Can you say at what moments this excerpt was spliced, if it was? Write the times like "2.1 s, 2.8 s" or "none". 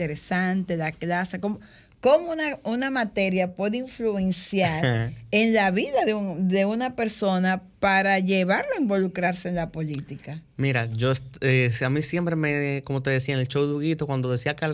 none